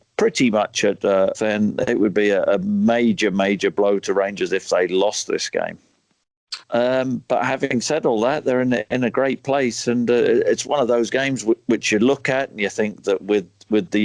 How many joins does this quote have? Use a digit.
2